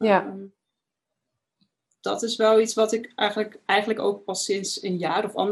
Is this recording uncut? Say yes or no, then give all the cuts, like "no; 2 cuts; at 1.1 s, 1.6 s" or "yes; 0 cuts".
no; 1 cut; at 3.7 s